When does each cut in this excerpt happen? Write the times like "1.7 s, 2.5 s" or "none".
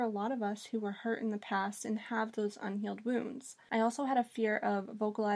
3.7 s